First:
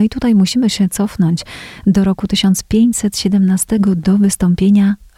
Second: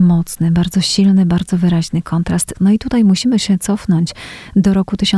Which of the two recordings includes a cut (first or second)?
second